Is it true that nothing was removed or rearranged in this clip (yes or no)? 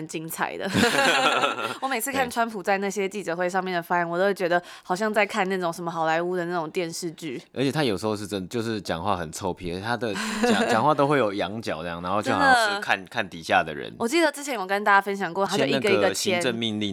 no